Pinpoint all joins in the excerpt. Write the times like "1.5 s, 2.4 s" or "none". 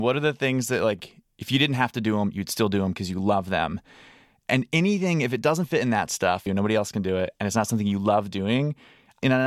6.5 s